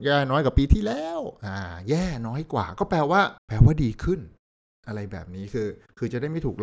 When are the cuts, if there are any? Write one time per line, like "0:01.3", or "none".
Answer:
0:03.4